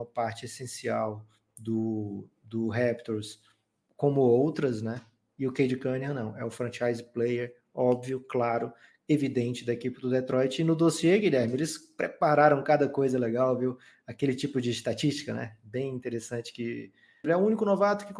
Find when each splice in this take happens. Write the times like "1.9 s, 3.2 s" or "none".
17.2 s